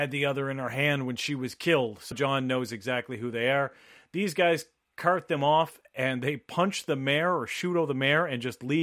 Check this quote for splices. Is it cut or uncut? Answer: cut